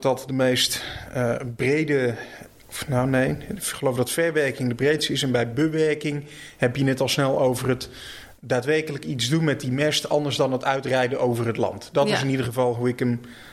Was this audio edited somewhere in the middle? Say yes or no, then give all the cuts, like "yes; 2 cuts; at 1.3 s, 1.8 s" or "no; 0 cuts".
no; 0 cuts